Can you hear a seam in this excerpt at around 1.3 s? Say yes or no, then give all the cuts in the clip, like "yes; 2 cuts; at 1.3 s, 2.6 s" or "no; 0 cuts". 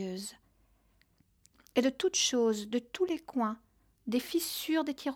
no; 0 cuts